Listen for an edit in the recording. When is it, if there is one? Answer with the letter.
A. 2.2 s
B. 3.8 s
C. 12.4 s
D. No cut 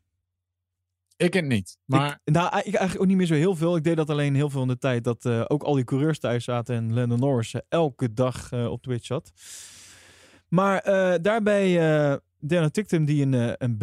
C